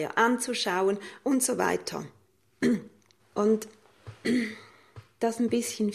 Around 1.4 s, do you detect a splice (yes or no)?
no